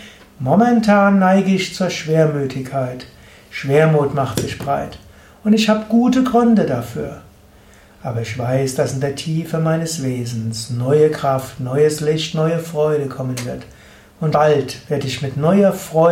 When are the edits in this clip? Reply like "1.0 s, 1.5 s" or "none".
14.3 s